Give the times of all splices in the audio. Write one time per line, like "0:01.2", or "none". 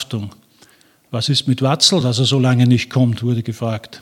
none